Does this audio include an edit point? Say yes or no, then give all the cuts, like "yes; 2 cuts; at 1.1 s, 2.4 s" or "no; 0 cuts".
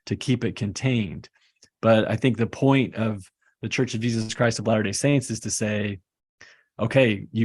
no; 0 cuts